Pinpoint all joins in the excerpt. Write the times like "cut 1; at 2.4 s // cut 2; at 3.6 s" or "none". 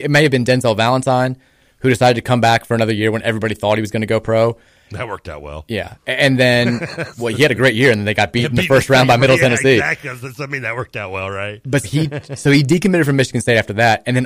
cut 1; at 11.8 s